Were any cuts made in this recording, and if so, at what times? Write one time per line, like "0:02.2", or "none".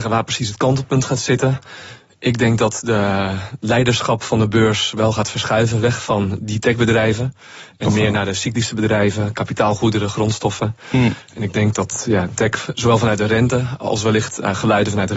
none